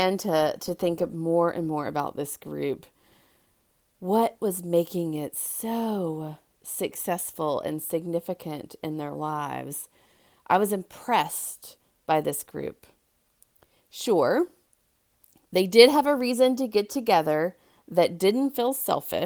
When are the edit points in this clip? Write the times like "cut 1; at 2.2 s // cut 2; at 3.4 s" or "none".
none